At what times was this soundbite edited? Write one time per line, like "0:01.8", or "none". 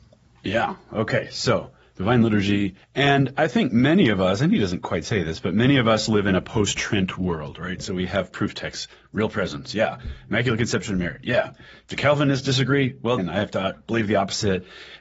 0:02.8
0:13.2